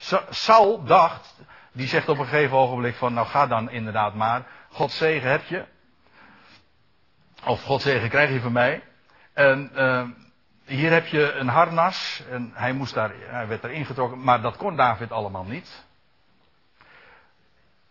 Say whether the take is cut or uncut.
uncut